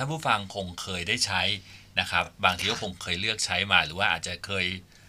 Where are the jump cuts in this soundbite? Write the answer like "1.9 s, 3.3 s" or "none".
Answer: none